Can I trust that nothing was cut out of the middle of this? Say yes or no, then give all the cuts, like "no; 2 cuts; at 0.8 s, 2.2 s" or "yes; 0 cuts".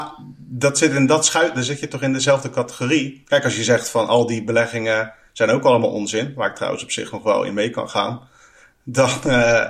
yes; 0 cuts